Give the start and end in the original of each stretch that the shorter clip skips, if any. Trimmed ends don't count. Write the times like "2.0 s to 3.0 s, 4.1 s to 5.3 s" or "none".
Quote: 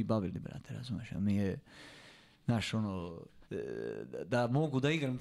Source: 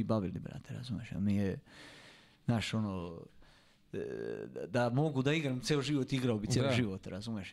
3.4 s to 3.9 s